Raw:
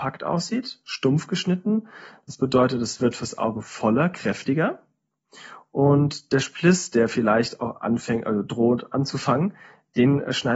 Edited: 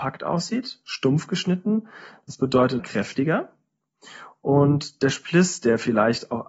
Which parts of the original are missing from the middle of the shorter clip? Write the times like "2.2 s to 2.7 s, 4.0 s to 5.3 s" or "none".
2.8 s to 4.1 s